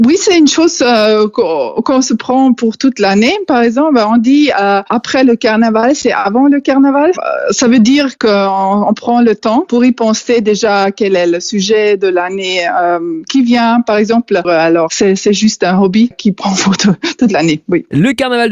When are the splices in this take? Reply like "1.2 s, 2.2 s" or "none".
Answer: 14.4 s, 16.1 s